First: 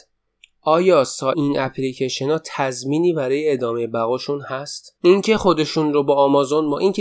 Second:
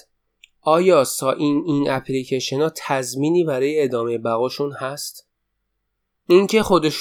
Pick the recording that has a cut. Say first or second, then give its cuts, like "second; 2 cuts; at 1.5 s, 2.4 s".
first; 2 cuts; at 1.3 s, 5.0 s